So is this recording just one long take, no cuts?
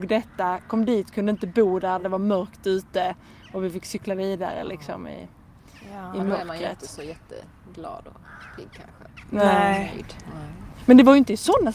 yes; 0 cuts

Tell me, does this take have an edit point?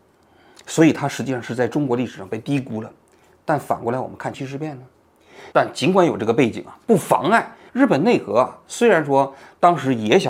yes; 3 cuts; at 4.3 s, 5.5 s, 7.7 s

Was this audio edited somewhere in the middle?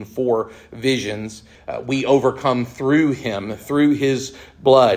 yes; 1 cut; at 1.6 s

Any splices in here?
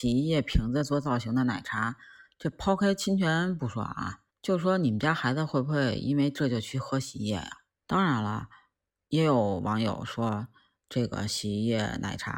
yes; 2 cuts; at 4.3 s, 7.8 s

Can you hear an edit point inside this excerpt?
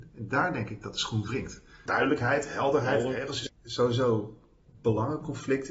yes; 2 cuts; at 1.9 s, 3.5 s

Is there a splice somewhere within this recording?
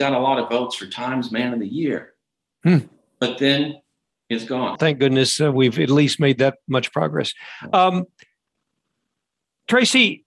yes; 1 cut; at 4.7 s

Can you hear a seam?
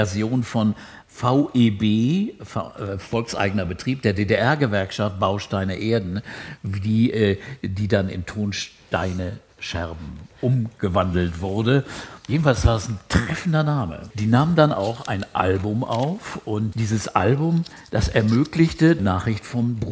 yes; 2 cuts; at 16.7 s, 19.0 s

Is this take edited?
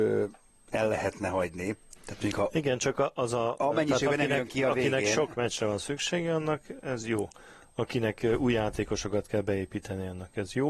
yes; 1 cut; at 2.0 s

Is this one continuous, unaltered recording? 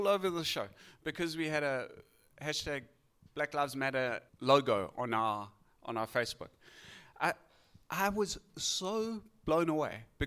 no; 1 cut; at 4.3 s

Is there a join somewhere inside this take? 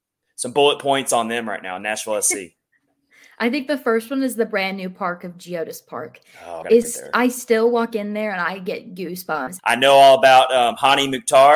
yes; 2 cuts; at 6.6 s, 9.6 s

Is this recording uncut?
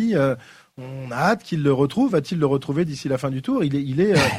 yes; 0 cuts

